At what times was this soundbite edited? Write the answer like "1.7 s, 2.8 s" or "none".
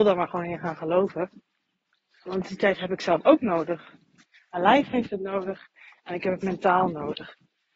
none